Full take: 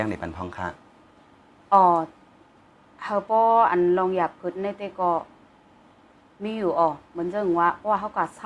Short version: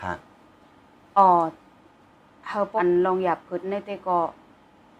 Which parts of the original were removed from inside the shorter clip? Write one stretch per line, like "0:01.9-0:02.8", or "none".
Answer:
0:03.3-0:03.7